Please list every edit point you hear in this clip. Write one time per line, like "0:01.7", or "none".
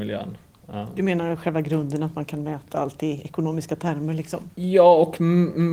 0:04.5